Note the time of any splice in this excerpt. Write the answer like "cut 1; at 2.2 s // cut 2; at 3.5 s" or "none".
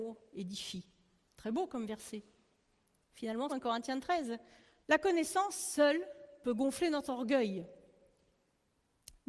cut 1; at 3.5 s // cut 2; at 4.8 s